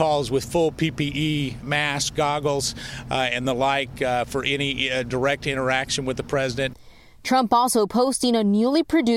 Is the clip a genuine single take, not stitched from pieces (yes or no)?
no